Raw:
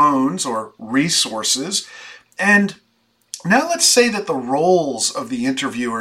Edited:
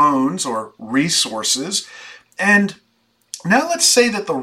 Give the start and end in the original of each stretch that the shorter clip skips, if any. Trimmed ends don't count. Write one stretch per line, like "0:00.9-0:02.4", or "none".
none